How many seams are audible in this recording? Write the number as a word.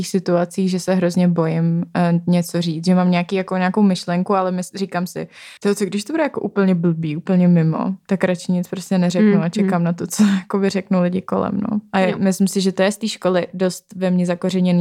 one